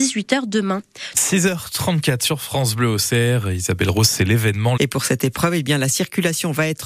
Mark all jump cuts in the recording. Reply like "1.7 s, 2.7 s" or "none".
1.1 s, 4.8 s